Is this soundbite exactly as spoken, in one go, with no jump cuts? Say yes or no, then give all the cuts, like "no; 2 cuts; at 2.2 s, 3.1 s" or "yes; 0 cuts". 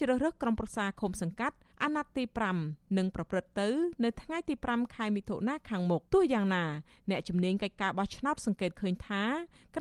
no; 1 cut; at 6.1 s